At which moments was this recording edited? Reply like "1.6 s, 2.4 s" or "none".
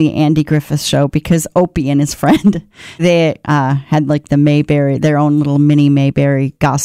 3.0 s